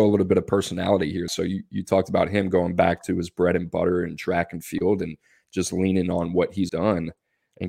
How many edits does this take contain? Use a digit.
2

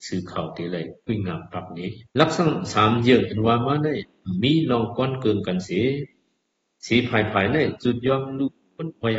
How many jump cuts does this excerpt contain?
1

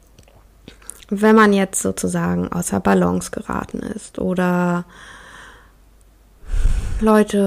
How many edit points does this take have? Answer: 0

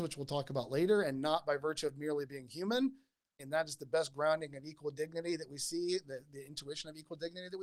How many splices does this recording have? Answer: 1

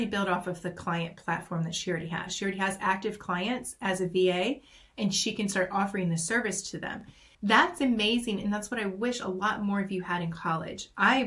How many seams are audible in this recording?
1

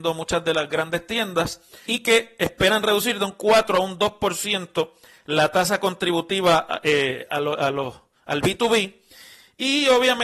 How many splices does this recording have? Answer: 1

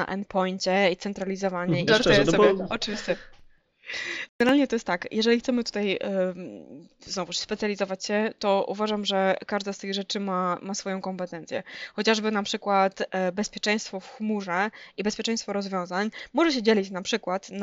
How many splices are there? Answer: 2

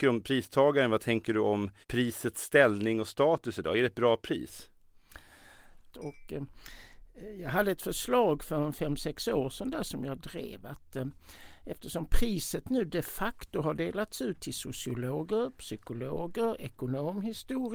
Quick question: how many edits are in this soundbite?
2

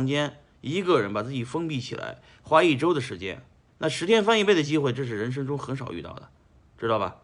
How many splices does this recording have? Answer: 1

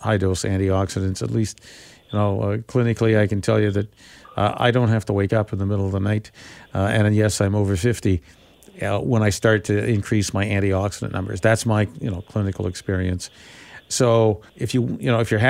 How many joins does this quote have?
1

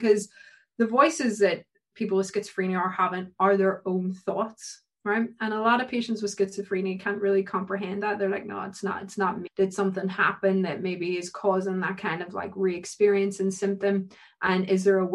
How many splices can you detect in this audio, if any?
1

